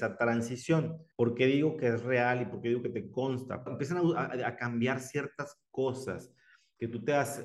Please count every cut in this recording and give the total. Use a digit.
2